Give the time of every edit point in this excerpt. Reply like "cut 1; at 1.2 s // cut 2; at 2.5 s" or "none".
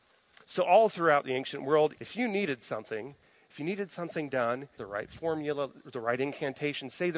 cut 1; at 2.0 s // cut 2; at 4.8 s

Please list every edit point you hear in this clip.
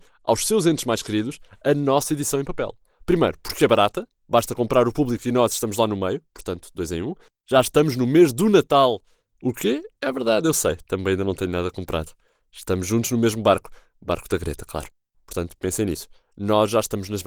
cut 1; at 7.3 s // cut 2; at 15.1 s

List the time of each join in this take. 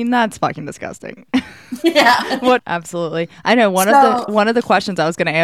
cut 1; at 2.6 s

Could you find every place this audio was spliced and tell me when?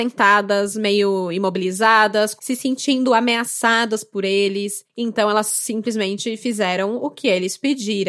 cut 1; at 2.4 s

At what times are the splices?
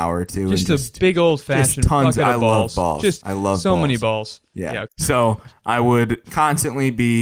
cut 1; at 4.8 s // cut 2; at 6.2 s

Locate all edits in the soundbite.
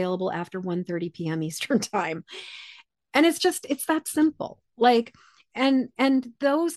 none

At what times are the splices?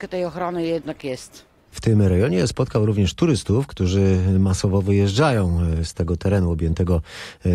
cut 1; at 1.7 s

